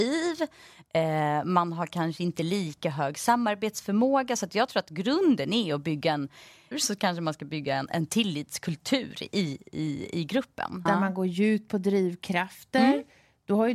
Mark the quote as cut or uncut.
cut